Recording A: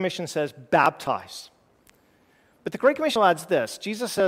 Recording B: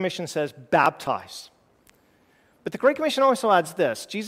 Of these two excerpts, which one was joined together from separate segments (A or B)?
A